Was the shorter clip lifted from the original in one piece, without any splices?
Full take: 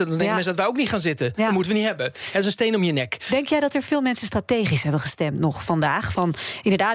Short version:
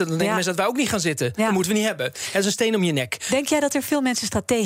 yes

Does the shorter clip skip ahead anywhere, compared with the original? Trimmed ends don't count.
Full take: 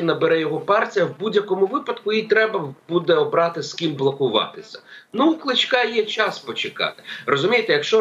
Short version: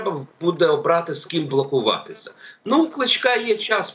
no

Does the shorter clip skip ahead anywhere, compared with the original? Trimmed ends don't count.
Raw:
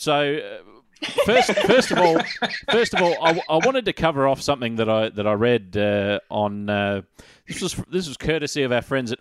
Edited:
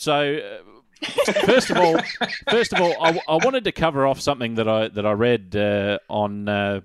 yes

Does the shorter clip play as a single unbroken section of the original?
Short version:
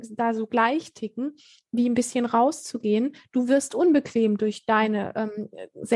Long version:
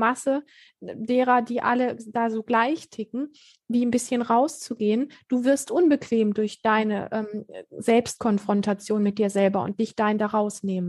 yes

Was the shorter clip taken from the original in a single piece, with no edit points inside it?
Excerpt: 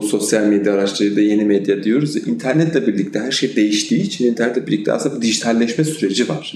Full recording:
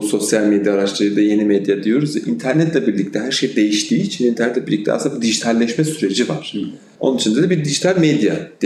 yes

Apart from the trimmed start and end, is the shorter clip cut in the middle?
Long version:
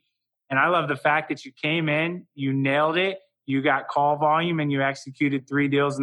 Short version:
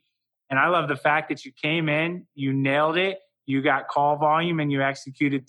no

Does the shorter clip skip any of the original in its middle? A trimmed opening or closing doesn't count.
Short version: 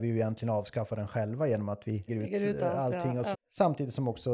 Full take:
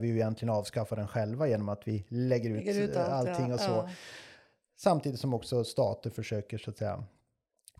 yes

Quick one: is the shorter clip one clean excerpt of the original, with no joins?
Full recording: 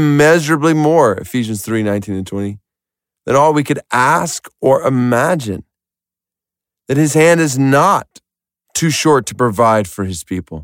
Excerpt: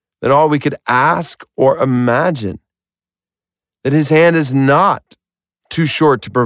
yes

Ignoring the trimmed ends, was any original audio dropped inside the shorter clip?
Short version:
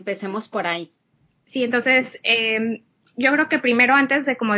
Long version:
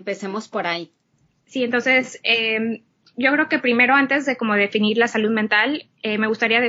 no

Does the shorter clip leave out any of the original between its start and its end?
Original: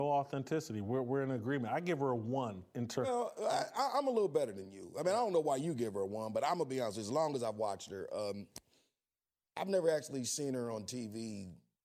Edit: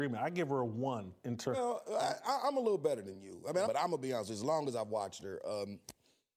yes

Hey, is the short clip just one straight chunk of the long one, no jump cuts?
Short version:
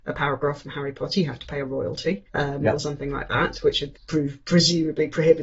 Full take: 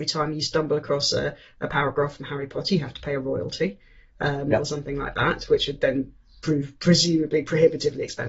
no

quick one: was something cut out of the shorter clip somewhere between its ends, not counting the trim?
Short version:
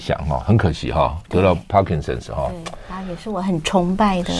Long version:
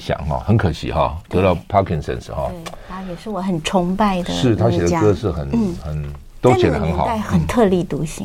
no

